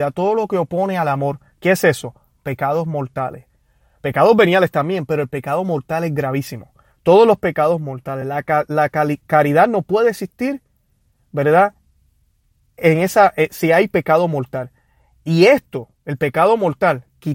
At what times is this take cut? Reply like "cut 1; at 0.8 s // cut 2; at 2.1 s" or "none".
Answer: none